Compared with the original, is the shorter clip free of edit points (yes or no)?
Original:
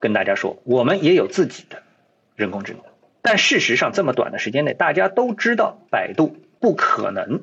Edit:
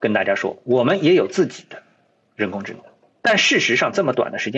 yes